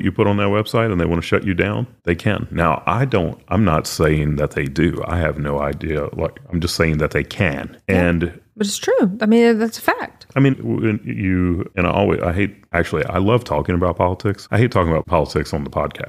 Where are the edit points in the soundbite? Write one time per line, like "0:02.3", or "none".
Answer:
0:02.0
0:10.5